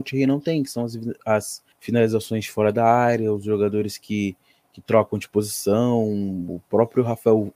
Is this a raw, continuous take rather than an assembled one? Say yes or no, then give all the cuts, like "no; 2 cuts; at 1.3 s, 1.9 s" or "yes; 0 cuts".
no; 1 cut; at 1.7 s